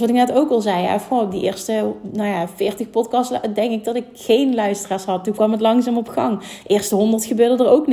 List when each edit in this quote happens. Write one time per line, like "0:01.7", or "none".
none